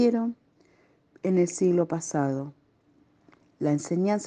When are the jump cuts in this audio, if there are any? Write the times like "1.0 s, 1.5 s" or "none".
none